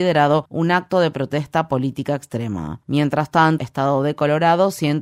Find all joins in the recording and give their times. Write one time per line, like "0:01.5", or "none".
0:03.6